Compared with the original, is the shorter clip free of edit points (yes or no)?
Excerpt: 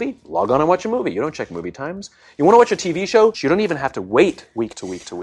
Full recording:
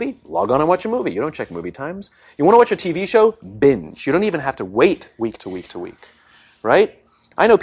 no